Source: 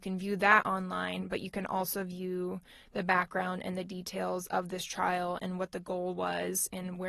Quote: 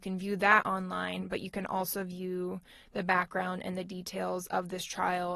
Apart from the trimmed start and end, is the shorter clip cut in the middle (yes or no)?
no